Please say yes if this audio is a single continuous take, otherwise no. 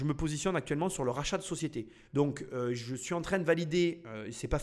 no